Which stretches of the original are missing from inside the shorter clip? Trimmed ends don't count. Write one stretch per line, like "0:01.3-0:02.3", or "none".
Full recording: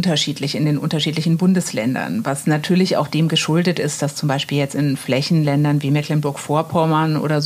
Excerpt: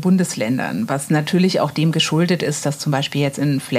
none